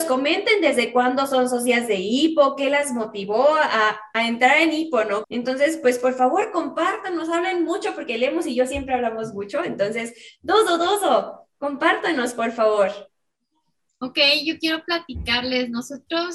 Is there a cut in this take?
yes; 1 cut; at 5.2 s

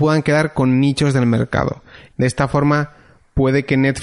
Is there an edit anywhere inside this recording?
yes; 1 cut; at 2.1 s

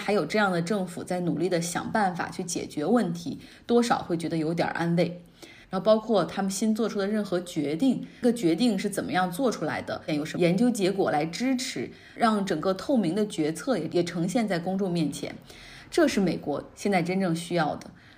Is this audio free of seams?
no; 2 cuts; at 5.6 s, 10.1 s

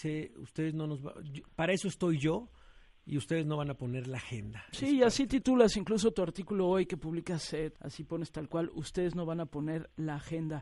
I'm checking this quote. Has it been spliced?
yes; 1 cut; at 7.7 s

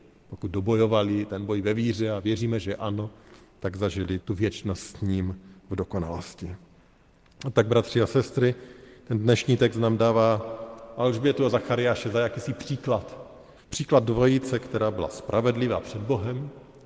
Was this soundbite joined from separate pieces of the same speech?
yes; 2 cuts; at 4.2 s, 13.6 s

